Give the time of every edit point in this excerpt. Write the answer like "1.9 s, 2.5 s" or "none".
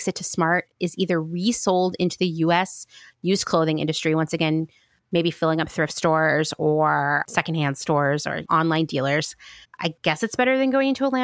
7.2 s, 8.4 s, 9.6 s